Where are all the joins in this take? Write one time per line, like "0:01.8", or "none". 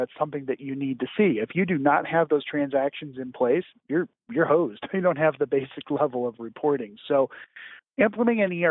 none